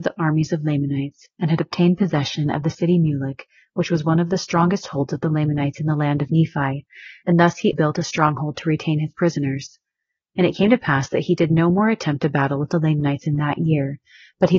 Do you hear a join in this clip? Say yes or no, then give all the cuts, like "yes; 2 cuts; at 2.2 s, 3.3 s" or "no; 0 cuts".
yes; 1 cut; at 7.7 s